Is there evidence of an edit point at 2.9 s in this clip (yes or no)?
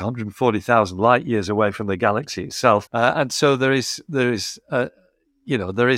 yes